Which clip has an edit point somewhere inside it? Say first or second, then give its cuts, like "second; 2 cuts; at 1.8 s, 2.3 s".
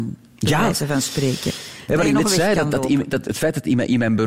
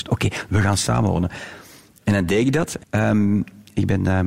second; 1 cut; at 2.8 s